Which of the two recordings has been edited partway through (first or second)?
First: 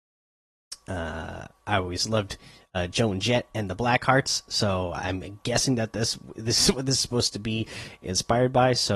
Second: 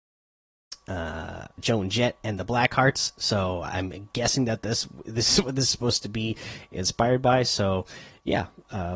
second